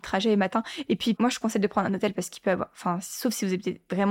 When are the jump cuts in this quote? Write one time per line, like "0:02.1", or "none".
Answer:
0:01.1